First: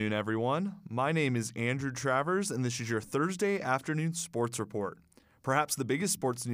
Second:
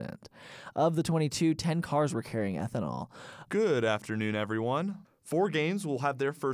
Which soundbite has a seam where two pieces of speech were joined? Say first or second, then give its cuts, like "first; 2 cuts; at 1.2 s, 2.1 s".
second; 2 cuts; at 3.5 s, 5.0 s